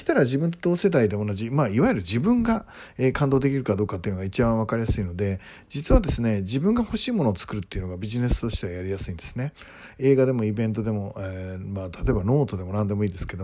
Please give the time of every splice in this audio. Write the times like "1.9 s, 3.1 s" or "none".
none